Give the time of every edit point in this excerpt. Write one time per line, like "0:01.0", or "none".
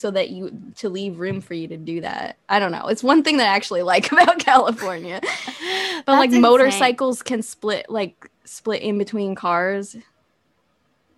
none

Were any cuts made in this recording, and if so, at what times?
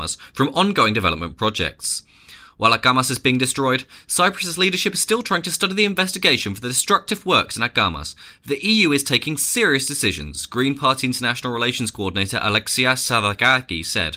none

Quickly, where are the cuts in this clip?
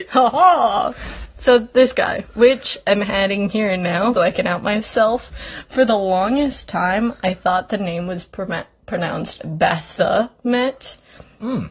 0:04.1

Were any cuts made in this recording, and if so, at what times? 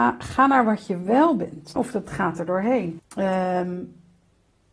0:01.8
0:03.0

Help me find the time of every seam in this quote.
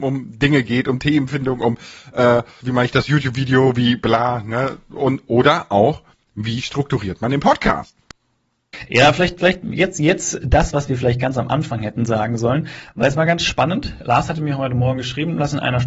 0:02.6

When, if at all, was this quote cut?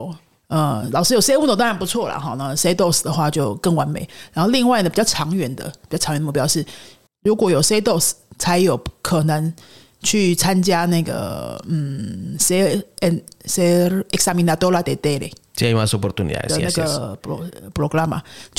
0:07.1

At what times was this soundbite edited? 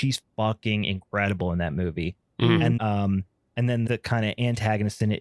0:02.8
0:03.9

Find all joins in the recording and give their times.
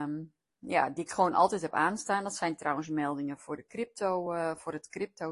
none

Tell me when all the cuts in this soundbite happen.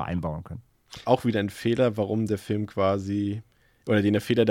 0:01.0

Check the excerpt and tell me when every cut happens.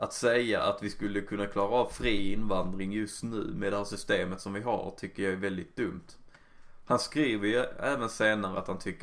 none

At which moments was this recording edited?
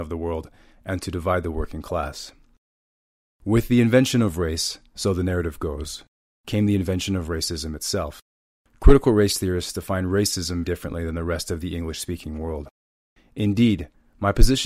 0:10.6
0:13.2

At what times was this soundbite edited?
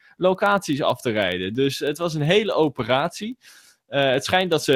none

